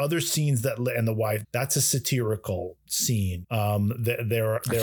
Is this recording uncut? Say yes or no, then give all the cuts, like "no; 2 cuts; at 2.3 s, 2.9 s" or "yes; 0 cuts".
no; 2 cuts; at 1.4 s, 3.4 s